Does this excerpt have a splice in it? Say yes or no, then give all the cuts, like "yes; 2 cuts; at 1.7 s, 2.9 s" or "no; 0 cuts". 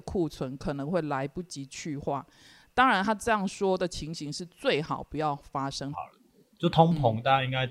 yes; 1 cut; at 5.9 s